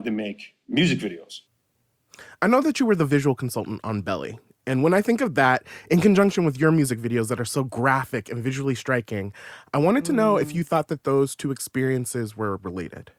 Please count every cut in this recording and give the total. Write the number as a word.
zero